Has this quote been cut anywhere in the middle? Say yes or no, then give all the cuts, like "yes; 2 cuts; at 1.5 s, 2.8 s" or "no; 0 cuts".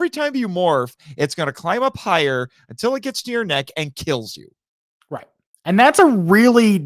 no; 0 cuts